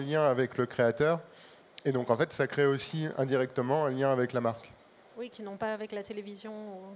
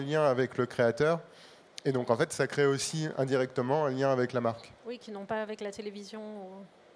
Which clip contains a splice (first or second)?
second